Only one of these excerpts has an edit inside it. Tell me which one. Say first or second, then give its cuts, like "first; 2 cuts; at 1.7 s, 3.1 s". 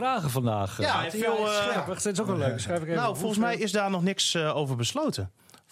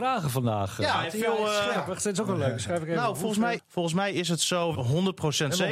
second; 2 cuts; at 3.6 s, 4.7 s